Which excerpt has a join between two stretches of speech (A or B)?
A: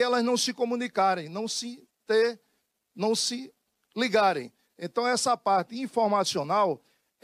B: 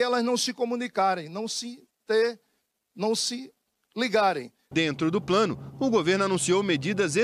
B